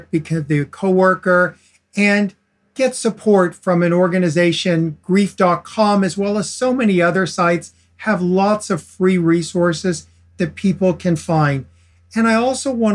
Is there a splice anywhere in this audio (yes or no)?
no